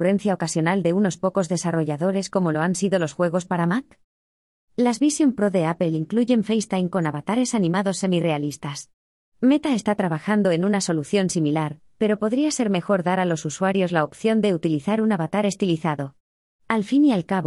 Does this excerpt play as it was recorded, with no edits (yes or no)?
yes